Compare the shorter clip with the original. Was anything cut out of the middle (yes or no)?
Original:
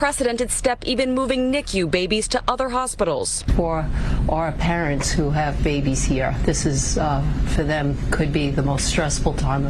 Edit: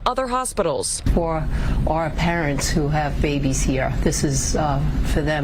no